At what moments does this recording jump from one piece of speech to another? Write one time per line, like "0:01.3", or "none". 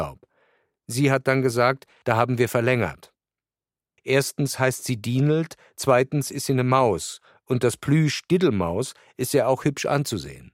0:02.0
0:04.0